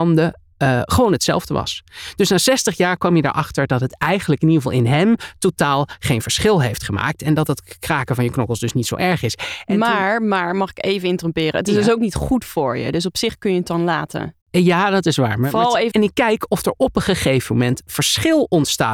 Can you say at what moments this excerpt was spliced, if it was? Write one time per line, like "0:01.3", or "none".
0:14.4
0:15.9